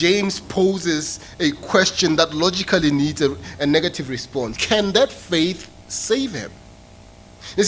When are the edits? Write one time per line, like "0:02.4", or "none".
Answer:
0:04.5